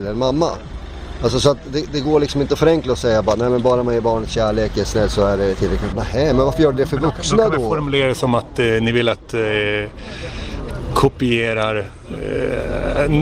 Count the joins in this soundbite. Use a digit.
1